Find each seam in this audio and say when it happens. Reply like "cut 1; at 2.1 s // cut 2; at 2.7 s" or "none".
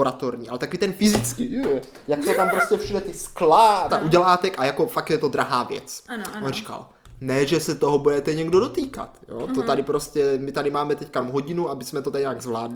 cut 1; at 3.9 s